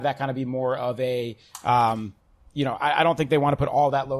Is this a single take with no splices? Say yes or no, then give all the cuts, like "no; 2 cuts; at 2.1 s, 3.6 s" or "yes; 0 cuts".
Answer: yes; 0 cuts